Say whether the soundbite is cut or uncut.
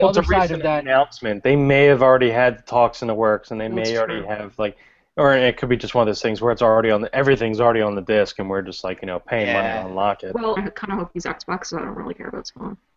cut